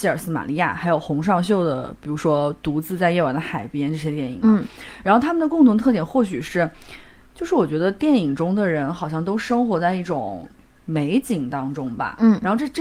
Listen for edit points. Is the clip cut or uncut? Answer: uncut